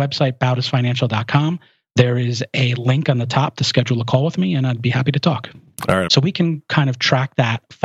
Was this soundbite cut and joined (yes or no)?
yes